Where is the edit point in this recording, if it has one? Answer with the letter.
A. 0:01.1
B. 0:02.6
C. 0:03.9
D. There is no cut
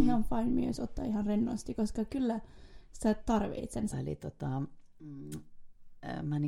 C